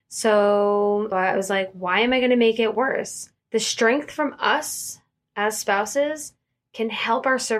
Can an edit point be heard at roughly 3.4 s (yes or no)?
yes